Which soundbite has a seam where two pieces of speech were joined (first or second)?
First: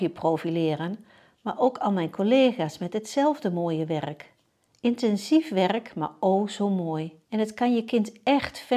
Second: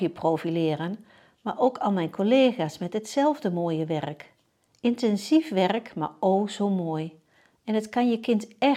first